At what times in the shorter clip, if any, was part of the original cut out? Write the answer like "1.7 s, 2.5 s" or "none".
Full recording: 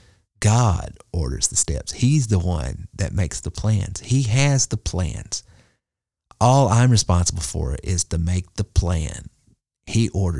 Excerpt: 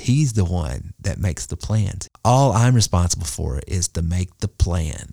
2.1 s